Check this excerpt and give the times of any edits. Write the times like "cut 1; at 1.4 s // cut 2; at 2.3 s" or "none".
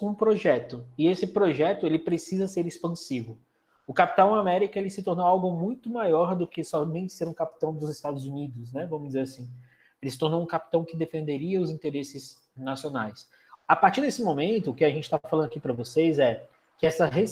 cut 1; at 13.5 s